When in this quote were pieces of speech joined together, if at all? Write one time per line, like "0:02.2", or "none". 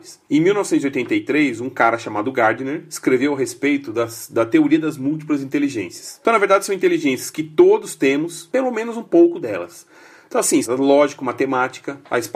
0:10.6